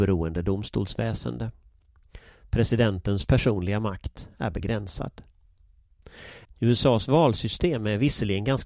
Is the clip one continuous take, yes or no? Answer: no